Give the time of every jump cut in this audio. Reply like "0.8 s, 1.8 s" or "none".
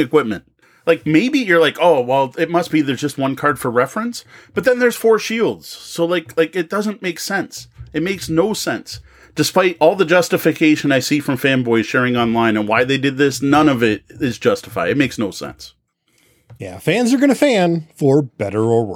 none